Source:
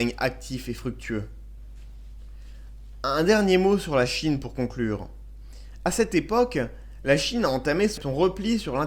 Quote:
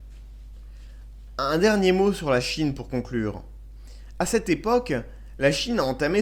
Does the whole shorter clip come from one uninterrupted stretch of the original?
yes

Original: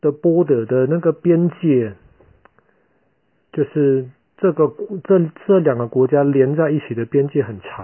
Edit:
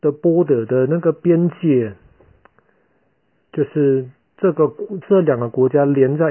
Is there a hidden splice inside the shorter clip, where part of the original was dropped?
yes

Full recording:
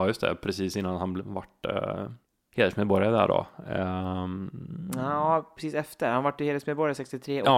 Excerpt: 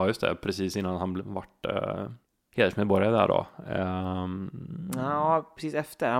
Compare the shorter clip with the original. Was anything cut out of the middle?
no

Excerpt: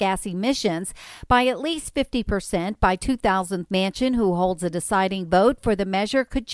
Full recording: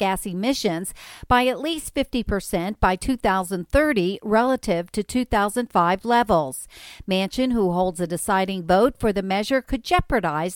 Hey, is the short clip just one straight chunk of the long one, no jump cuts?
no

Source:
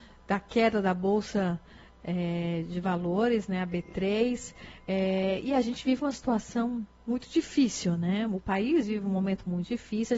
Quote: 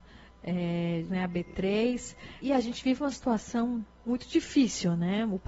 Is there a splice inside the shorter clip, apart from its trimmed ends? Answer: yes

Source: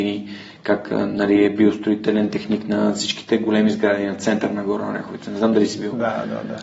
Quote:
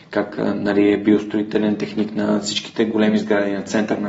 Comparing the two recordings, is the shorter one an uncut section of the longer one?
yes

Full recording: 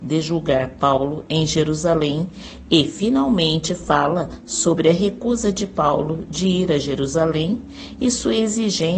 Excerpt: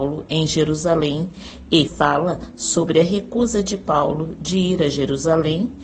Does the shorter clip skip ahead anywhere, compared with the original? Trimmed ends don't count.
yes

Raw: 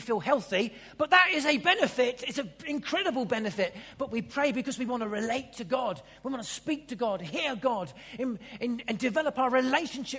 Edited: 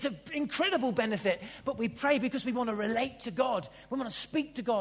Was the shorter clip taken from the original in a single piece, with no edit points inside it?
yes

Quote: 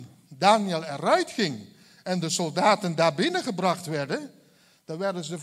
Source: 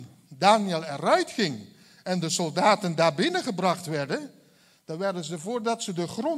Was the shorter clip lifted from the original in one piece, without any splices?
yes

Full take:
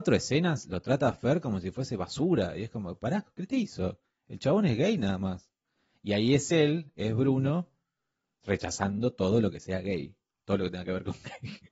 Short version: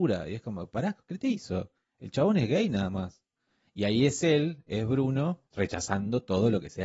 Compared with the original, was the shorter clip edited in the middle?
yes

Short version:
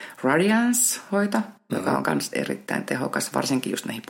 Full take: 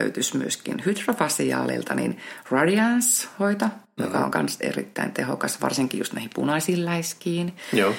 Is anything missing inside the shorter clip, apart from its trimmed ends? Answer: no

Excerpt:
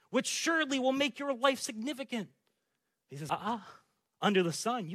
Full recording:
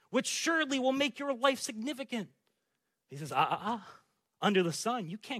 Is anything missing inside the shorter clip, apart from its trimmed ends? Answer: yes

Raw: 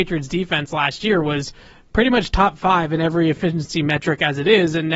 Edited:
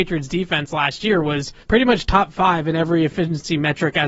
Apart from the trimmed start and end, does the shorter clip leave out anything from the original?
yes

